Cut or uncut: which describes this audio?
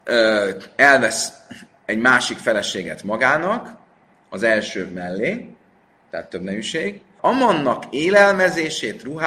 cut